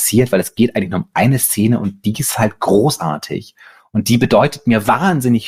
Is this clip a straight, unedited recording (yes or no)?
yes